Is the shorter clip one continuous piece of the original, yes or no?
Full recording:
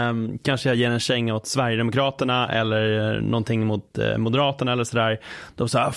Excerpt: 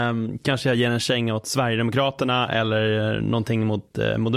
yes